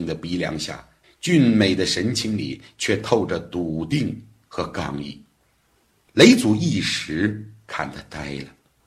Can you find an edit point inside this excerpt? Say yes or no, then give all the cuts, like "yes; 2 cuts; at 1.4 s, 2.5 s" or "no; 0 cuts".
yes; 1 cut; at 1.0 s